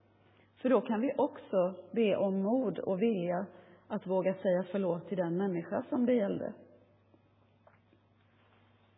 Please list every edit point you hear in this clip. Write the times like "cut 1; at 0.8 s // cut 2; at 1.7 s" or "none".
none